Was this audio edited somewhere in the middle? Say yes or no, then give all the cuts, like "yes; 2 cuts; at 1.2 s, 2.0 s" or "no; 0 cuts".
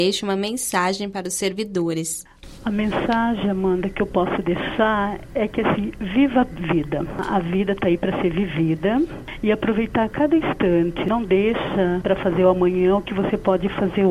no; 0 cuts